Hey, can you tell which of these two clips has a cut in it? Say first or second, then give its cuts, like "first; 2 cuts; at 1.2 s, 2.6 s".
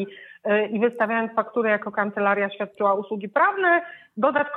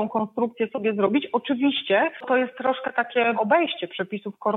second; 2 cuts; at 2.2 s, 3.3 s